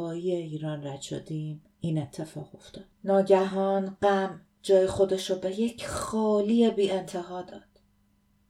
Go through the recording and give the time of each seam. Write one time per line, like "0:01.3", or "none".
0:02.9